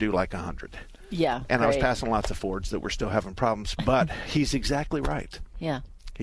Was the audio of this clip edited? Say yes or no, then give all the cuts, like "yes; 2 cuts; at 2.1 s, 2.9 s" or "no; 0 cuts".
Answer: no; 0 cuts